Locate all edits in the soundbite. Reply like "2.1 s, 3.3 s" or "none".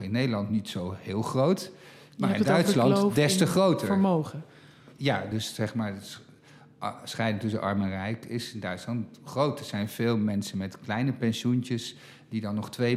none